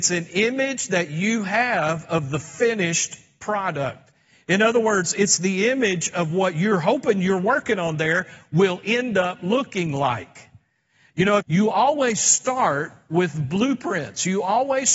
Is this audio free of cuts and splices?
no; 1 cut; at 11.4 s

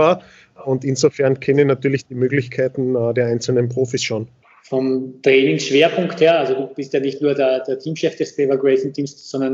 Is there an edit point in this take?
no; 0 cuts

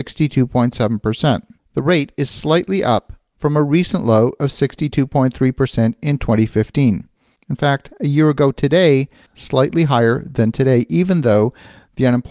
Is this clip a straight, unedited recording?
no; 3 cuts; at 1.6 s, 7.4 s, 9.3 s

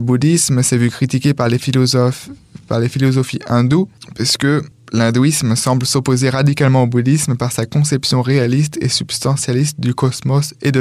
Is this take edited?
no; 0 cuts

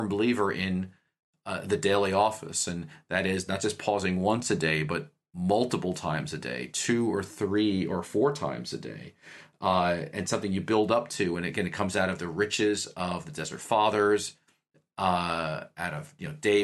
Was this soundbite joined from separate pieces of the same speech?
no; 0 cuts

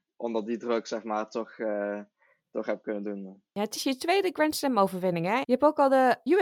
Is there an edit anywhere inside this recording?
no; 0 cuts

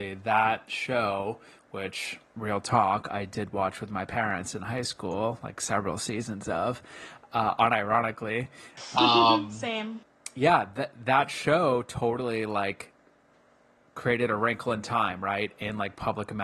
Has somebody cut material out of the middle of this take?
no; 0 cuts

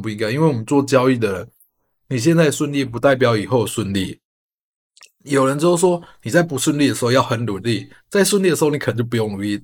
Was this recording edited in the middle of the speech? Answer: no; 0 cuts

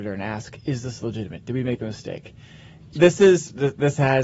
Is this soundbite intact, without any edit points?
no; 1 cut; at 2.9 s

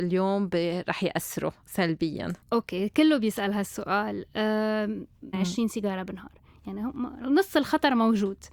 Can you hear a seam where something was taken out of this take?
yes; 2 cuts; at 2.4 s, 5.3 s

